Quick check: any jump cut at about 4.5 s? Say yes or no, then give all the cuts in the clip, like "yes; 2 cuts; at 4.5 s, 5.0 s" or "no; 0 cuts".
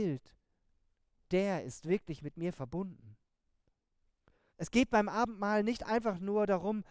yes; 1 cut; at 4.5 s